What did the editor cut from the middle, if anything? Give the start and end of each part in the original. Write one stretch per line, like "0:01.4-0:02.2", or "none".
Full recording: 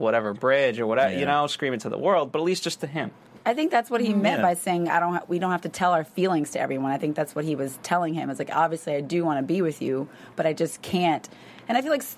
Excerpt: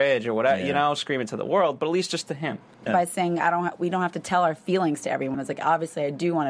0:03.4-0:04.4
0:06.8-0:08.2